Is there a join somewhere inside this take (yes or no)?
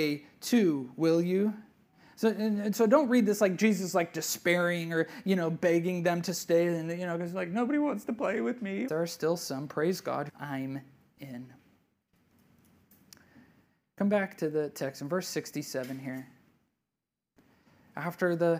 yes